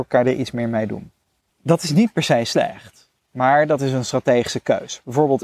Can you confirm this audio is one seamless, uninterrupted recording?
no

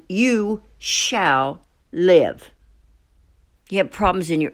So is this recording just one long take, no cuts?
no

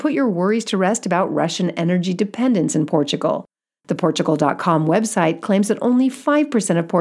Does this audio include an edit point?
no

